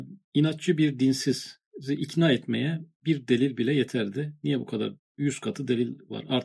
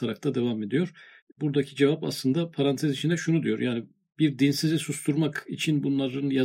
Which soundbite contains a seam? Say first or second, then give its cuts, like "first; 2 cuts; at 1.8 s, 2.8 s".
first; 1 cut; at 2.9 s